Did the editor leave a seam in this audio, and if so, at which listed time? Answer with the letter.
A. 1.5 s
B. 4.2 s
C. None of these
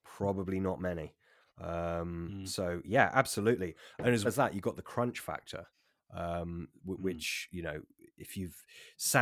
B